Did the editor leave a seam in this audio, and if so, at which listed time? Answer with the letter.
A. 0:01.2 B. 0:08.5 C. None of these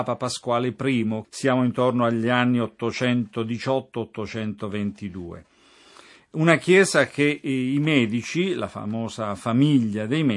A